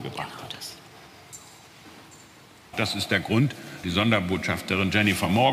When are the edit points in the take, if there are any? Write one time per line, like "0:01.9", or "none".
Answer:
0:02.7
0:03.8